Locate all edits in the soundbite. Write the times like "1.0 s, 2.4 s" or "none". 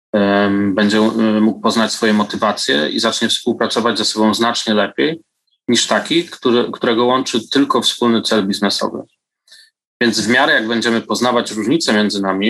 9.9 s